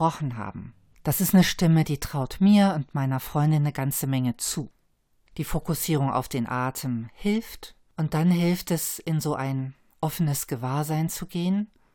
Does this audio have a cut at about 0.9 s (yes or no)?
no